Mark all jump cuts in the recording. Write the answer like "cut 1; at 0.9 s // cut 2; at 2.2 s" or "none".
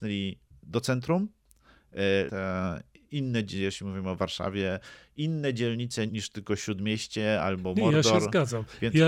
cut 1; at 2.3 s // cut 2; at 6.1 s